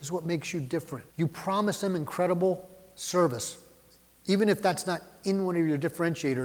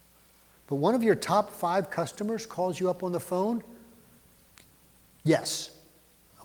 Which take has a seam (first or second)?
first